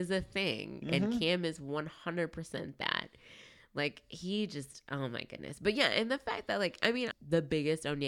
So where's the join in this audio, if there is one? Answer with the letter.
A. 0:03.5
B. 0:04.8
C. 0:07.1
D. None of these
C